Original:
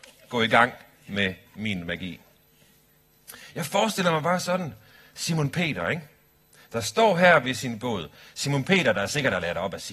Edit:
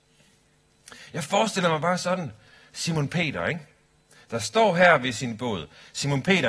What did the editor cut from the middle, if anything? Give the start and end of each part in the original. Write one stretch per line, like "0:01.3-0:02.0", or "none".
none